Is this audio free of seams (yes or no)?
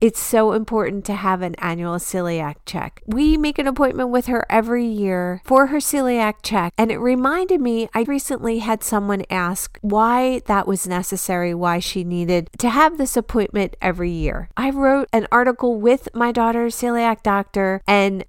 no